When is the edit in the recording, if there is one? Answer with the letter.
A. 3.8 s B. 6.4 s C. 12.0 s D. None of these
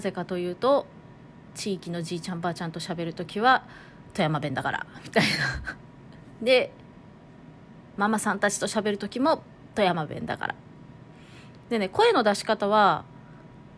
B